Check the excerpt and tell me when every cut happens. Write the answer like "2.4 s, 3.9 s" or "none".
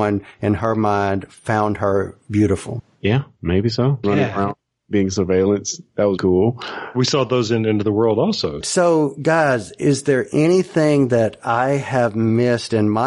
4.0 s, 6.2 s, 8.6 s